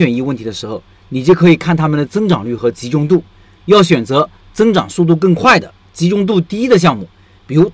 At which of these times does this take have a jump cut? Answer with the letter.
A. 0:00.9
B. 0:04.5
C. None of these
C